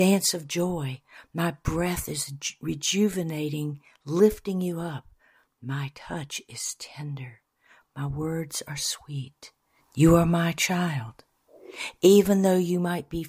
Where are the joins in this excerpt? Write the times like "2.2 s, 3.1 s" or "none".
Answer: 9.8 s